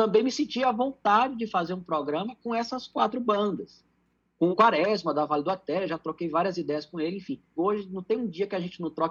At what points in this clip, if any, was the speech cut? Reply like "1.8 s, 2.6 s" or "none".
4.5 s, 7.6 s